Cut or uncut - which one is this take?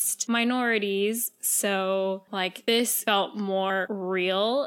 uncut